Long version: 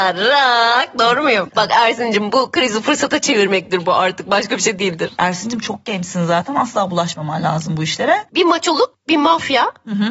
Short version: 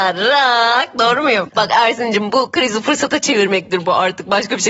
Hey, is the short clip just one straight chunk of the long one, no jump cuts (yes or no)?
yes